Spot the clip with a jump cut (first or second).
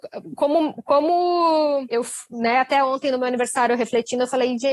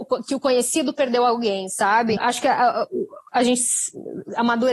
second